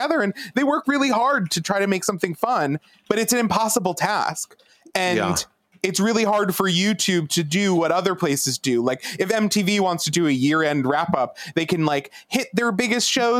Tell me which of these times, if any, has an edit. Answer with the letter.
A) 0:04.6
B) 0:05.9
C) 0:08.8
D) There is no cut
D